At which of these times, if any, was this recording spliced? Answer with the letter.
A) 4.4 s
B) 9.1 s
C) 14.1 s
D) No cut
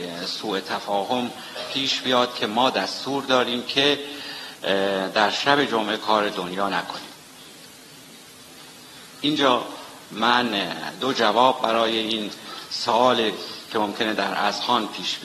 B